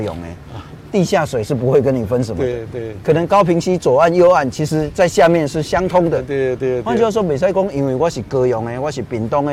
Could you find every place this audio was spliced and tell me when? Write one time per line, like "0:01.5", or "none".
none